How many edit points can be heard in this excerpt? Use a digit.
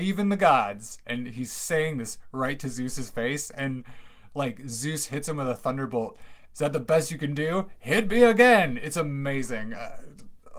1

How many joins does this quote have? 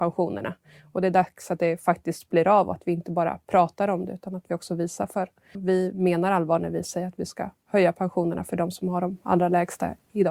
1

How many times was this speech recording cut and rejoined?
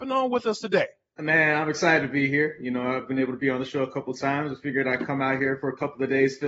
0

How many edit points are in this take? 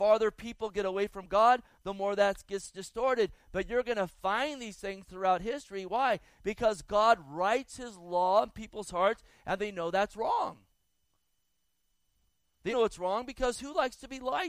1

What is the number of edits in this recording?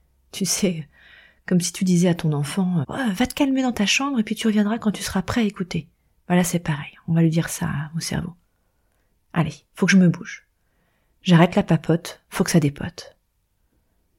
1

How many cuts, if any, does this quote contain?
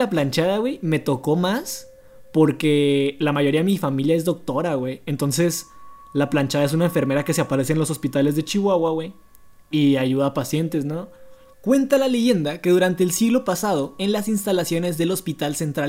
1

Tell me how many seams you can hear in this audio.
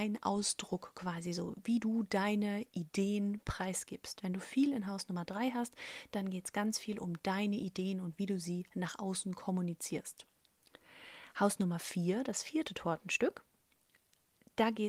0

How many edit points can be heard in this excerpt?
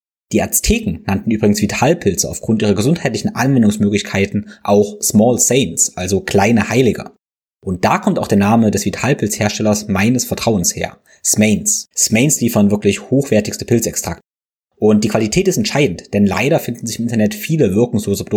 1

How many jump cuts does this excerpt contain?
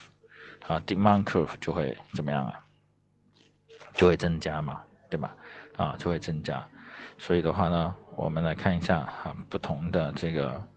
0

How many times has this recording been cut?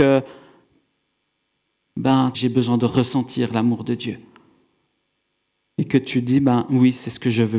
1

